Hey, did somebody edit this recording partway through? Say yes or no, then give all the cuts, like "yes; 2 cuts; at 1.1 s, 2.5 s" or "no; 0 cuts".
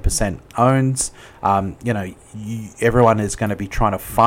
no; 0 cuts